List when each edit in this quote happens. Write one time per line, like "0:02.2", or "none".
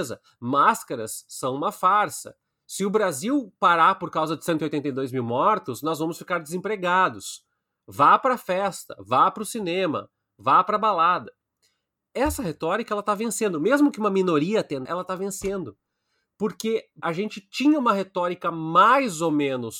0:14.8
0:17.0